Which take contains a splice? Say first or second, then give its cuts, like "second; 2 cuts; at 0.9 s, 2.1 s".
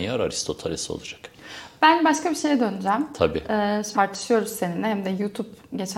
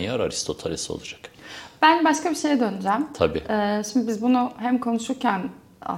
first; 1 cut; at 3.9 s